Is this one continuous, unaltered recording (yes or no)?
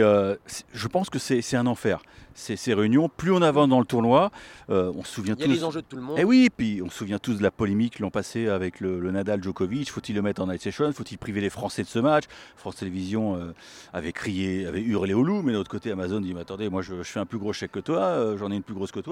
yes